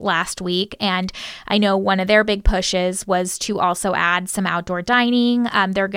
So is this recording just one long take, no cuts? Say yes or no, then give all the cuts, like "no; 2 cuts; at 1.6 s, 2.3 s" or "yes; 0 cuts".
yes; 0 cuts